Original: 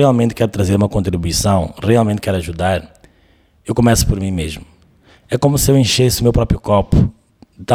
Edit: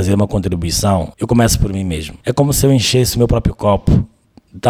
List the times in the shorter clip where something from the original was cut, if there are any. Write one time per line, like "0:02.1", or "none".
0:01.1
0:02.2